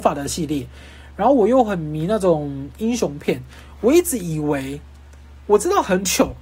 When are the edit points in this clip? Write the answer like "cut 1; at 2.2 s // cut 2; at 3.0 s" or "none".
none